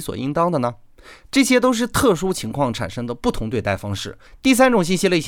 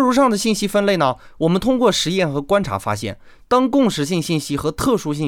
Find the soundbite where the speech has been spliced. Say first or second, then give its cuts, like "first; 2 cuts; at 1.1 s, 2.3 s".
first; 1 cut; at 4.3 s